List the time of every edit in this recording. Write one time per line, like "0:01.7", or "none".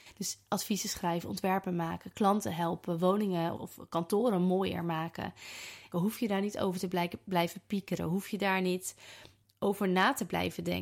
0:03.6
0:05.9